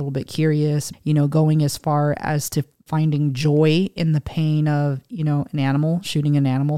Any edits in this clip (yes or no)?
yes